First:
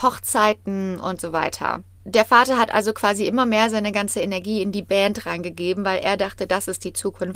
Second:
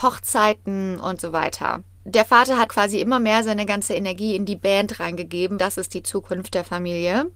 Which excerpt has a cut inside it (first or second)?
second